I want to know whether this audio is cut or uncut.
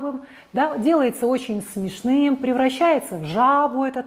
uncut